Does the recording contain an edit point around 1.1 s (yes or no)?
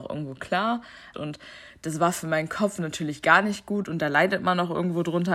yes